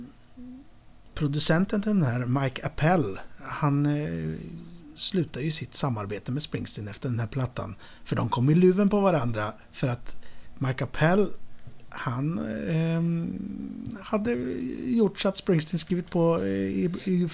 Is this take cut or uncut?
uncut